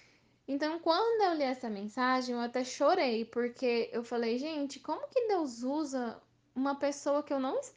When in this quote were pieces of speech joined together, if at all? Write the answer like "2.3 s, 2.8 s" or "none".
none